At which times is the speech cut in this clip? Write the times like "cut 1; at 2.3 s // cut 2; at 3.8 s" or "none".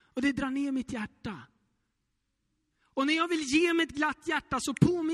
cut 1; at 2.7 s